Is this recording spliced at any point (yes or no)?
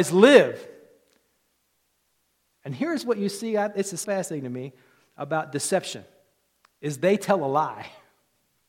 yes